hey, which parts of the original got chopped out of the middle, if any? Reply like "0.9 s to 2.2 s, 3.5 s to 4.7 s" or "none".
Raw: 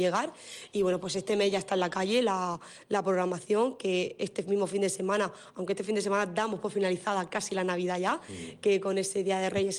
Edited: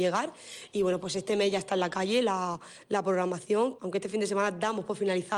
3.8 s to 5.5 s